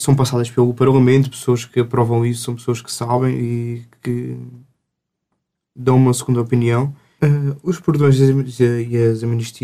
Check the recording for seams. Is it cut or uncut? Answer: cut